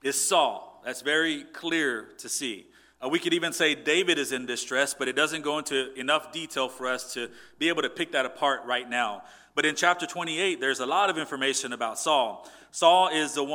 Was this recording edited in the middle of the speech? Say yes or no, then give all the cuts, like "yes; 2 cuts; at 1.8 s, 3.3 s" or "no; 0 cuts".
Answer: no; 0 cuts